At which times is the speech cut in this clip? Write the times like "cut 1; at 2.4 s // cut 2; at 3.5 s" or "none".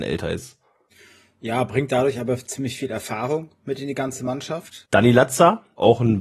cut 1; at 4.9 s